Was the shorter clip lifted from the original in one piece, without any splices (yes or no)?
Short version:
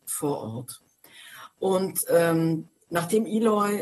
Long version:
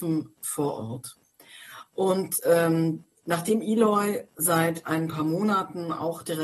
yes